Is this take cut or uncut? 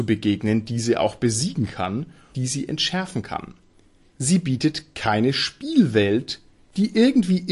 cut